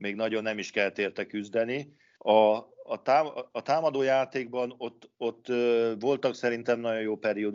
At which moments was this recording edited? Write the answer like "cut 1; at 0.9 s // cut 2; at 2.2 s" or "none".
cut 1; at 2.2 s